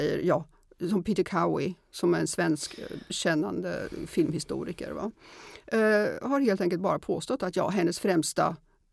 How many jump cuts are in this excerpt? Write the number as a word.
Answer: zero